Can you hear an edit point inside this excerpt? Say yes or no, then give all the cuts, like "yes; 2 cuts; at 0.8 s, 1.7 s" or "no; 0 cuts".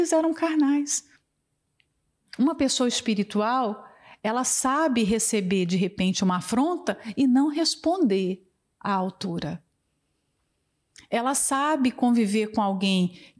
no; 0 cuts